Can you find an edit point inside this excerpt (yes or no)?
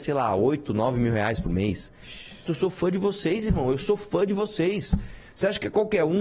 yes